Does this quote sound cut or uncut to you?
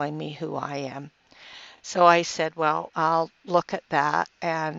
uncut